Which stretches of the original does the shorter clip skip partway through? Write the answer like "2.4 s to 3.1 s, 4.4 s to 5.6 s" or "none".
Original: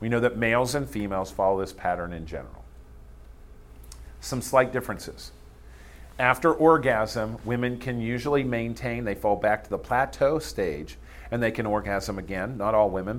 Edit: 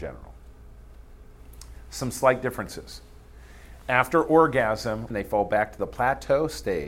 7.4 s to 9.0 s